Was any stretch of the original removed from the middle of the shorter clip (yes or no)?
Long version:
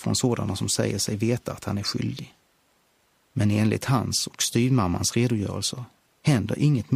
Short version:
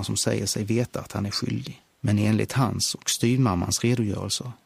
yes